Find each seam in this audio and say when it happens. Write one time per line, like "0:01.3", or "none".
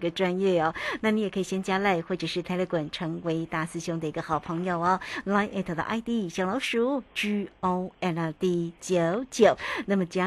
none